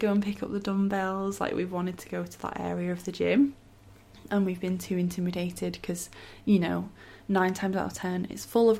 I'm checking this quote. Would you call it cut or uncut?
uncut